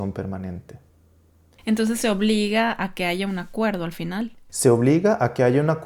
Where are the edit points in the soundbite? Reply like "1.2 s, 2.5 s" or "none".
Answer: 1.5 s